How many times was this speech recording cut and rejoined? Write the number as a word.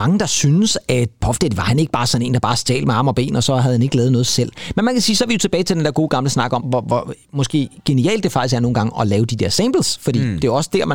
one